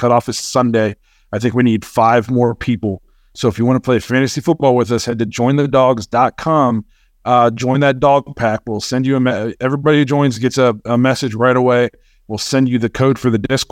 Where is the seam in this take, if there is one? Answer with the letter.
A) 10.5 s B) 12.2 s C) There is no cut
C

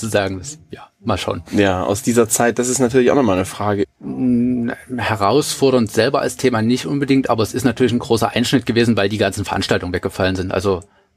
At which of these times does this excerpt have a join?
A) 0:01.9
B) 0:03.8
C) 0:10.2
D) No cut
B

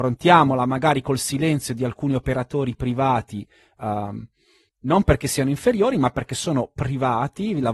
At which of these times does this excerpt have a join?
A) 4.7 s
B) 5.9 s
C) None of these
A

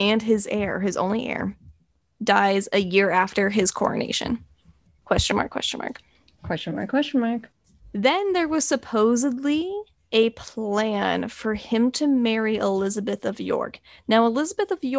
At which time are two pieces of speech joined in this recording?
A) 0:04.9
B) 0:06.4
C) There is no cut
A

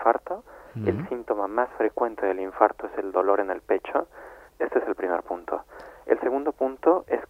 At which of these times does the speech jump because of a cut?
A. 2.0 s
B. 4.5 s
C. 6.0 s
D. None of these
B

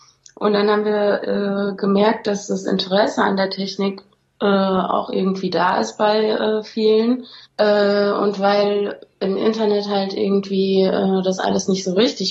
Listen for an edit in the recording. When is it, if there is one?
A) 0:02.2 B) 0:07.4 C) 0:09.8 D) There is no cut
B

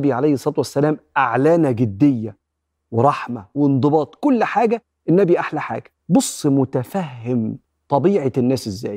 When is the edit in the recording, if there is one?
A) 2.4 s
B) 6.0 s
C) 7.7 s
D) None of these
B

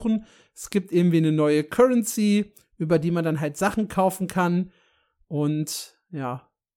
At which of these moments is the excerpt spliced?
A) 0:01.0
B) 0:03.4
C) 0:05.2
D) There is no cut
D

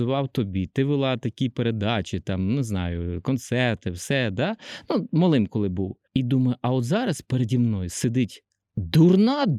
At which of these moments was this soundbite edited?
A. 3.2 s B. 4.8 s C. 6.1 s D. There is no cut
C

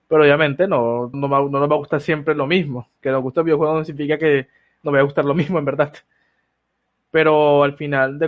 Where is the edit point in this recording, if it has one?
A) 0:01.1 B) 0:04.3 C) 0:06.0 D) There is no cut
A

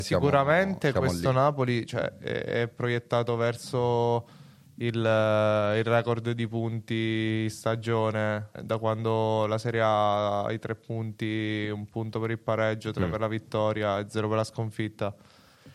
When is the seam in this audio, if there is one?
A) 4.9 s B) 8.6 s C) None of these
B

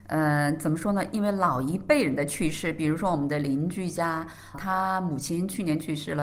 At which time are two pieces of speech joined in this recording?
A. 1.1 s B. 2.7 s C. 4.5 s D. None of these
C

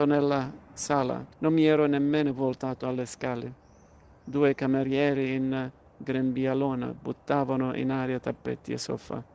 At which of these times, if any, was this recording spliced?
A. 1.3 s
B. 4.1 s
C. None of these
A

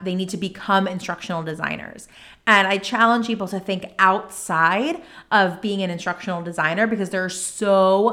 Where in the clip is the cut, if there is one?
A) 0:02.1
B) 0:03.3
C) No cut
C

